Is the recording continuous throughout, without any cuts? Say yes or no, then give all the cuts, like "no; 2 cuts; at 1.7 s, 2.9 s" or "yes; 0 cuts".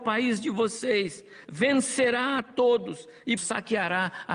no; 2 cuts; at 1.4 s, 3.4 s